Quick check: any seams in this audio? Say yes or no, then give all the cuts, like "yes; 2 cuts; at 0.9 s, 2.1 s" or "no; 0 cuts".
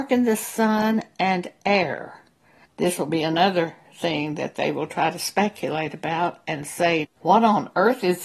yes; 2 cuts; at 2.6 s, 7.0 s